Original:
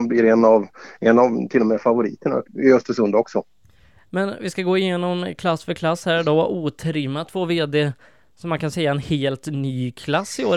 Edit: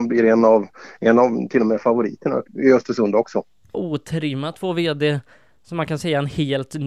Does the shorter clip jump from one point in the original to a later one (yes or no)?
yes